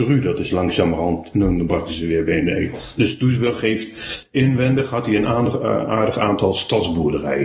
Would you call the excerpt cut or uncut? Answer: cut